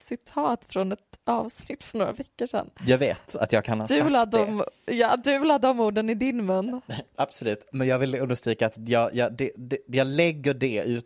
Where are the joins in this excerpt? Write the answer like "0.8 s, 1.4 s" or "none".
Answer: none